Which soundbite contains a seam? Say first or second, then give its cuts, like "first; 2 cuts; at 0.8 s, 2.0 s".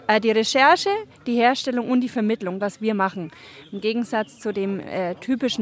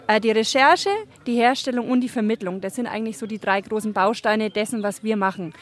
first; 1 cut; at 2.6 s